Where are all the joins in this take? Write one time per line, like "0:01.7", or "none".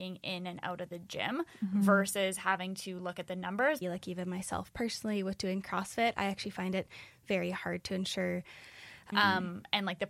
0:03.8
0:09.1